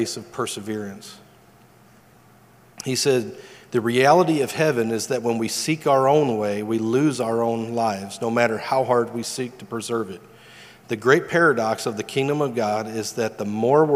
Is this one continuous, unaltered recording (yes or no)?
yes